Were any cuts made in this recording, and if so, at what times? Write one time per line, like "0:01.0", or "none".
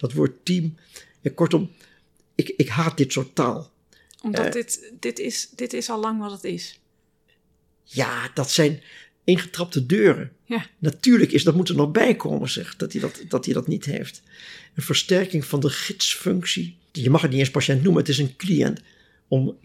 0:16.9